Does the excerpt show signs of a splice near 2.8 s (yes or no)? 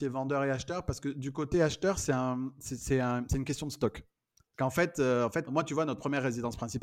no